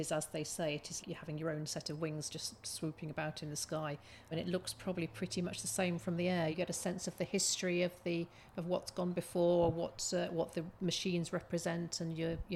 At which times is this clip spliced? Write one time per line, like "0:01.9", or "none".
0:01.0
0:04.3
0:06.5